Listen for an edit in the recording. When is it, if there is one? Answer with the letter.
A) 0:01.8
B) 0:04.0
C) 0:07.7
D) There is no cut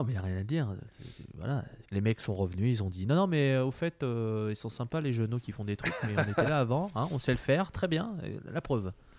A